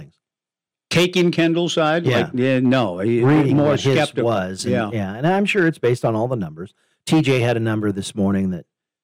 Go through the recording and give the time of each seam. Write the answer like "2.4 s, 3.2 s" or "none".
none